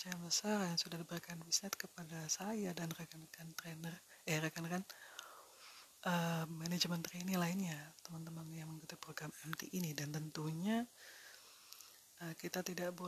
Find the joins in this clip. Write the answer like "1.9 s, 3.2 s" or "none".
none